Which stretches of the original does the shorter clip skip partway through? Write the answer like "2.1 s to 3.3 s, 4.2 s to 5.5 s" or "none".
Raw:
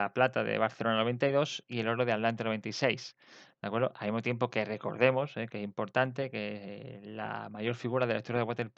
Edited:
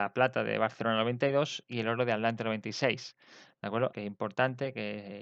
3.9 s to 5.5 s